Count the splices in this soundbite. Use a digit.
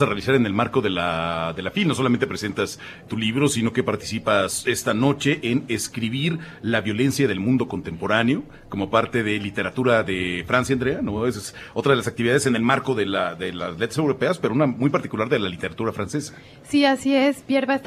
0